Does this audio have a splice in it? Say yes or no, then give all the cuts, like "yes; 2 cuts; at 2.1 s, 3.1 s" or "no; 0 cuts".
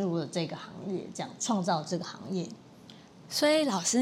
no; 0 cuts